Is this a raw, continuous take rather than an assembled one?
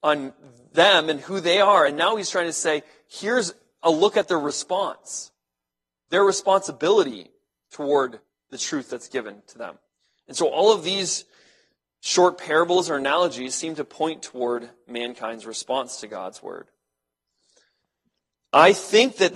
yes; 0 cuts

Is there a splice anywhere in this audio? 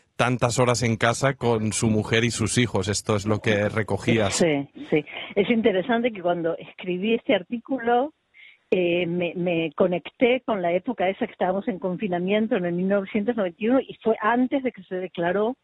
no; 0 cuts

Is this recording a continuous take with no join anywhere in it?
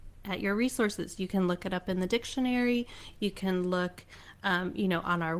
yes; 0 cuts

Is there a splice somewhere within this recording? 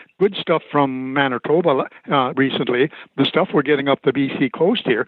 no; 0 cuts

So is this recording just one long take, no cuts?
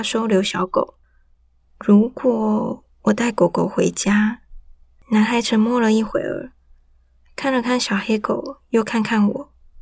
yes; 0 cuts

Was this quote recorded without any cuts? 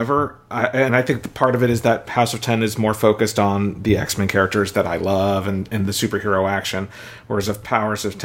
yes; 0 cuts

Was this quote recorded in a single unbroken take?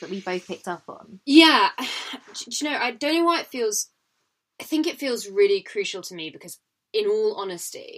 yes; 0 cuts

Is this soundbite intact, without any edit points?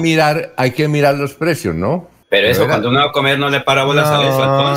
no; 1 cut; at 2.2 s

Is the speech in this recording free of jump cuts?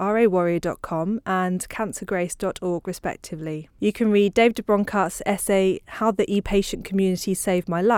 no; 1 cut; at 3.7 s

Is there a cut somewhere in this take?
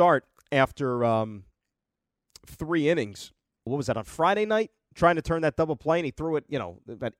yes; 1 cut; at 3.7 s

